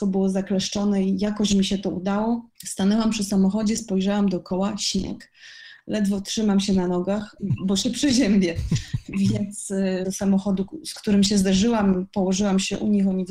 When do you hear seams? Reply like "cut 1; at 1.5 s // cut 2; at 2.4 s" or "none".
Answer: cut 1; at 2.5 s // cut 2; at 7.4 s // cut 3; at 10.0 s